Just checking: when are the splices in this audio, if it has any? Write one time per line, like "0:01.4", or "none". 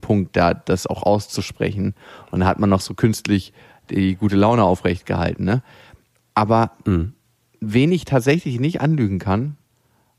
none